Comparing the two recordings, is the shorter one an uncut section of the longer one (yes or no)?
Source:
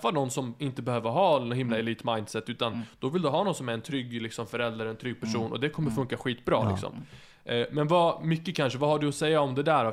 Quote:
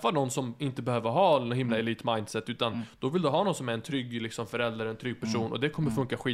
yes